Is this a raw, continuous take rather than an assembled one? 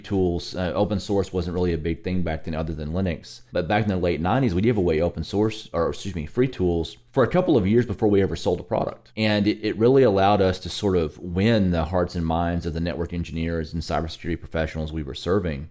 yes; 0 cuts

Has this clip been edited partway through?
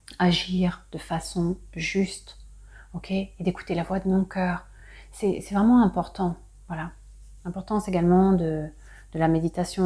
no; 0 cuts

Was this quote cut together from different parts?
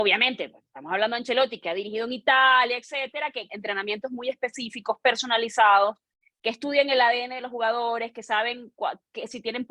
yes; 1 cut; at 3.5 s

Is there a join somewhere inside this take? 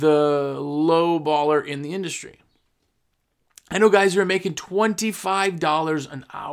no; 0 cuts

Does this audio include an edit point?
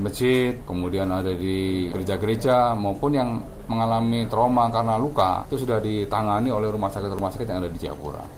no; 0 cuts

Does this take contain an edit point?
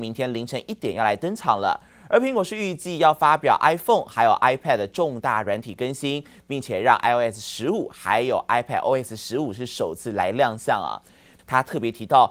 yes; 1 cut; at 11.4 s

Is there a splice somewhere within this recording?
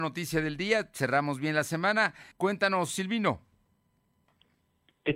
yes; 1 cut; at 2.3 s

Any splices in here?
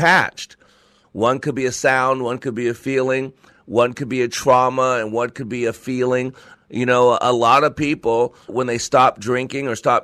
yes; 3 cuts; at 1.0 s, 6.5 s, 8.5 s

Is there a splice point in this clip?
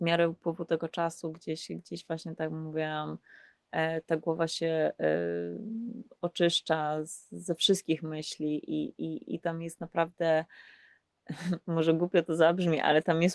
no; 0 cuts

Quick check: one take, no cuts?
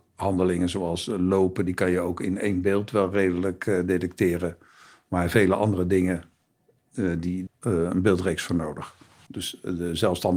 no; 2 cuts; at 7.5 s, 9.3 s

